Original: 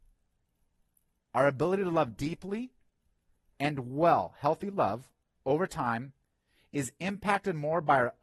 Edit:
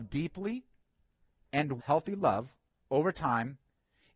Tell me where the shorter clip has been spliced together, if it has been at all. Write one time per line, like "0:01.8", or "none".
0:01.8